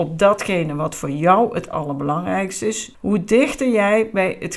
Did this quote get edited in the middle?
yes; 1 cut; at 2.9 s

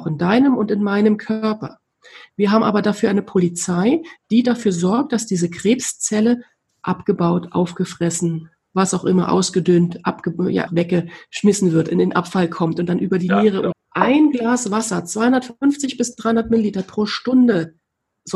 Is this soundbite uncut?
no; 2 cuts; at 10.7 s, 13.7 s

